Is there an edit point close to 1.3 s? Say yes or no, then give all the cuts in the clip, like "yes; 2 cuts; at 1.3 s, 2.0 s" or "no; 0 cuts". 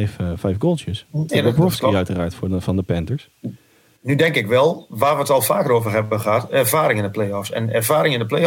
yes; 1 cut; at 1.3 s